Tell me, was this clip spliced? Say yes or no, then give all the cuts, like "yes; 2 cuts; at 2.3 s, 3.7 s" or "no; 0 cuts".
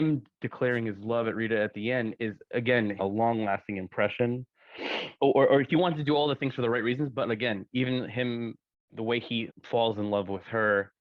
yes; 3 cuts; at 3.0 s, 5.2 s, 9.5 s